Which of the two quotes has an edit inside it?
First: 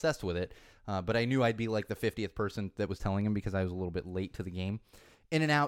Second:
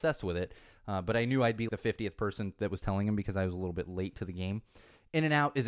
second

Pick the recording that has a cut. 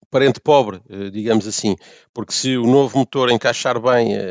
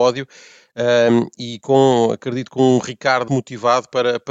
second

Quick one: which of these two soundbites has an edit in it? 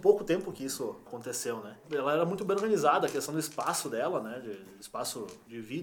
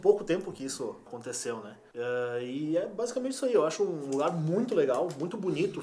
first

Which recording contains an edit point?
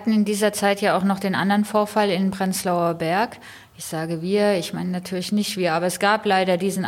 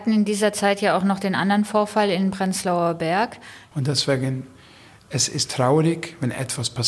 second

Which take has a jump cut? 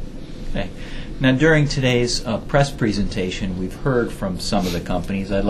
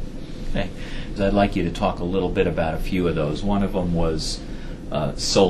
second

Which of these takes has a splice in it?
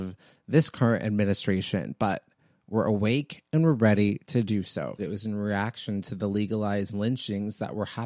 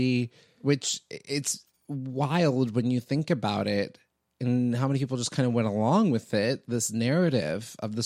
first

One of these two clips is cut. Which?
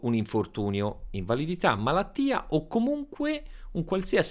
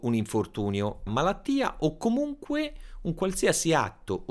second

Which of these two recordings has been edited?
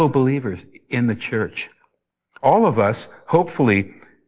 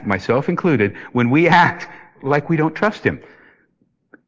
first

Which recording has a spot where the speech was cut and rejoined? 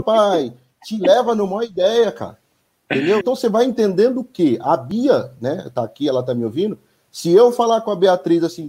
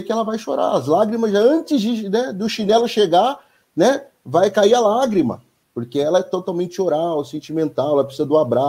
first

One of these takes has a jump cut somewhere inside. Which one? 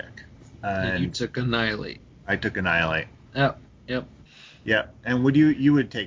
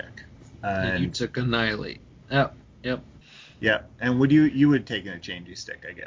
second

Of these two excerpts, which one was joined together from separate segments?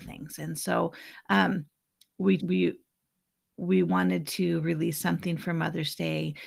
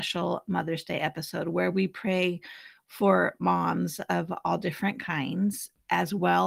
first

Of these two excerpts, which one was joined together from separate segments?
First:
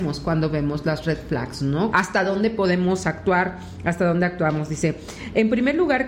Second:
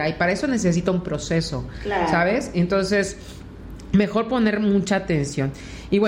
first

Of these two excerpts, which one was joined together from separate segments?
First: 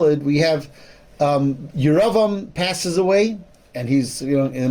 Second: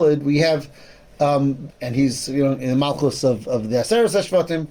second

